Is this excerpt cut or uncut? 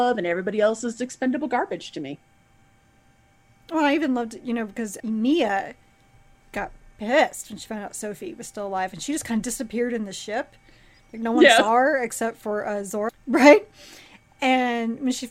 cut